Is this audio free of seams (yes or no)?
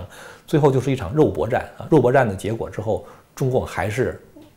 yes